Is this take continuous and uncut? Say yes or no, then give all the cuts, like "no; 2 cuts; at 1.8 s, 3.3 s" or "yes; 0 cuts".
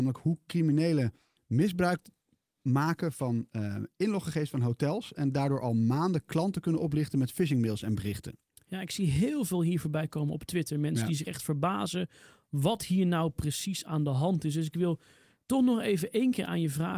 no; 1 cut; at 1.4 s